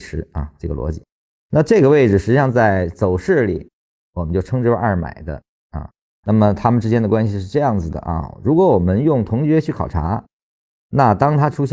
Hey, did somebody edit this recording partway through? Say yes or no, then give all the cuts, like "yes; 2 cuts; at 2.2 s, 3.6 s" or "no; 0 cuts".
yes; 1 cut; at 6.2 s